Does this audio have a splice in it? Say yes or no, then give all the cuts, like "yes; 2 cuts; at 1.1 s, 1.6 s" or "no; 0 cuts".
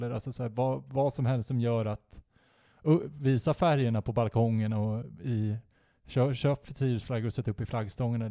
no; 0 cuts